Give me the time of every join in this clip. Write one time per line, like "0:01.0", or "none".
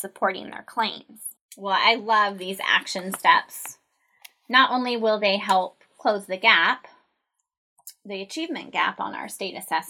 0:01.4